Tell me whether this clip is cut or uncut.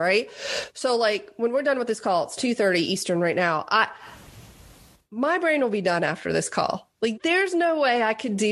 cut